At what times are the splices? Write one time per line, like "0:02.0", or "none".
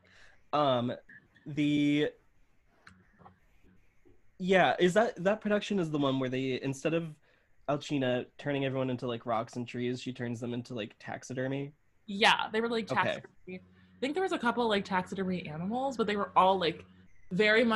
none